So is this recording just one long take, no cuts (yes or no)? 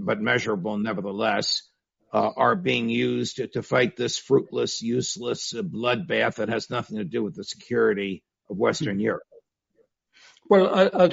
yes